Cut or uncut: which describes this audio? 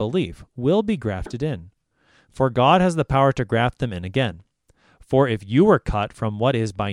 uncut